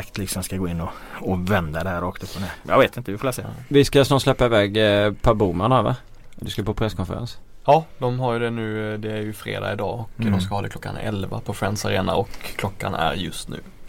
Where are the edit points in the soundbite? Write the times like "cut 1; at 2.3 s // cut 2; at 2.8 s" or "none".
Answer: none